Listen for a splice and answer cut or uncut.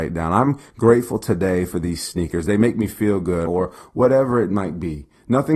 cut